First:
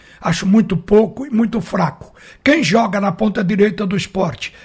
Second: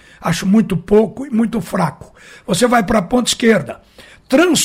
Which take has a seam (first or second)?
first